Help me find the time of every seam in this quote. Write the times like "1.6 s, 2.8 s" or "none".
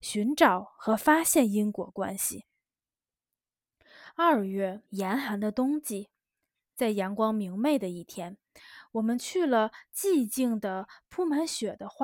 4.8 s